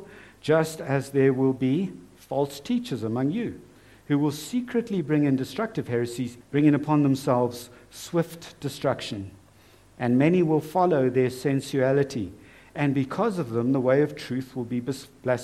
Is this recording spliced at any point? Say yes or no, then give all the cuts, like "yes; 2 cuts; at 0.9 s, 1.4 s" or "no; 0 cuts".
yes; 1 cut; at 6.4 s